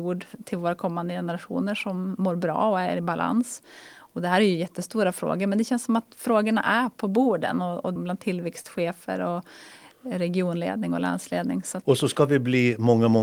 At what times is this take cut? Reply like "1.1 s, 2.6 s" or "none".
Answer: 6.1 s, 8.0 s